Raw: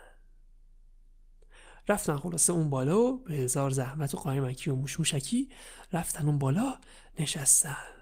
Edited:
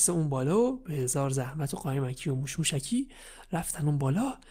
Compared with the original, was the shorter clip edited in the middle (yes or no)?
no